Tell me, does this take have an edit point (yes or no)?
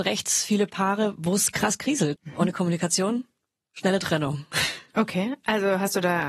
yes